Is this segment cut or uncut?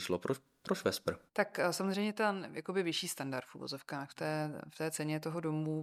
cut